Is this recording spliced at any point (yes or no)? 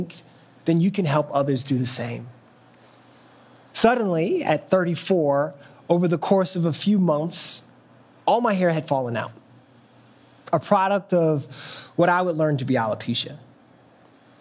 yes